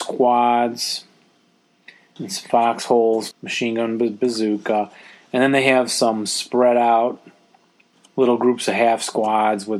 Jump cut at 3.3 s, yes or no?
yes